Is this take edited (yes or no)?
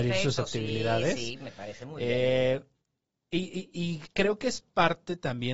no